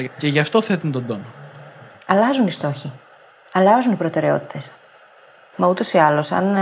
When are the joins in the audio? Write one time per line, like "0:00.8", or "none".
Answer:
0:01.9
0:05.5